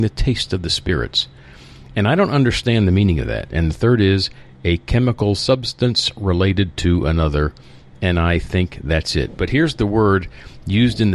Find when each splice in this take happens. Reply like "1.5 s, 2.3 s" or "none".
3.5 s, 9.4 s